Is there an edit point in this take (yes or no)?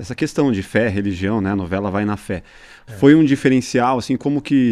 no